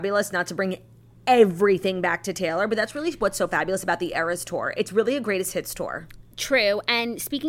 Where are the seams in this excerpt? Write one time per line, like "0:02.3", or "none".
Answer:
none